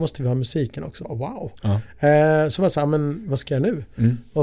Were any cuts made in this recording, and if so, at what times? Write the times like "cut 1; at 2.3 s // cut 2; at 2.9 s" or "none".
cut 1; at 1.0 s